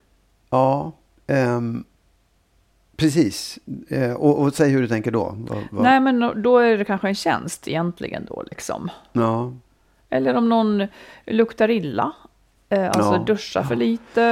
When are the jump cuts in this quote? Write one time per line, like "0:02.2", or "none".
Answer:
none